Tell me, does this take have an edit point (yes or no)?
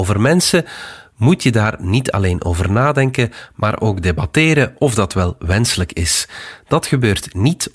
no